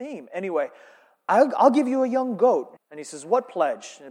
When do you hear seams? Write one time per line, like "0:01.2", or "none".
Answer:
0:02.8